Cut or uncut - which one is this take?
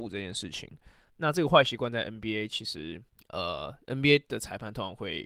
cut